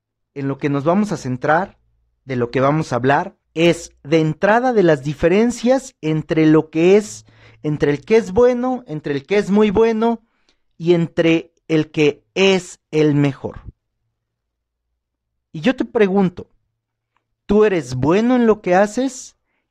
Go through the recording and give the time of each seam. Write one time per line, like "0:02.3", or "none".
0:03.4